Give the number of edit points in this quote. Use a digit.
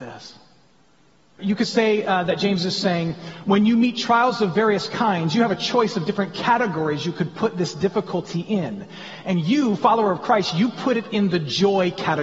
1